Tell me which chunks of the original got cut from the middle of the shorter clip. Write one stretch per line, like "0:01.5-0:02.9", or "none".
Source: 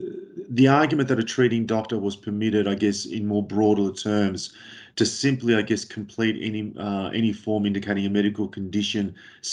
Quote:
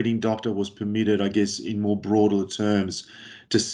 none